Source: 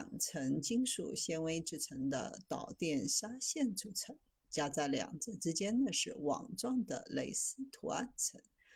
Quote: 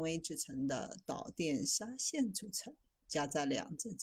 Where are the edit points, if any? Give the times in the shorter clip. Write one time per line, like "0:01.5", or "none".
none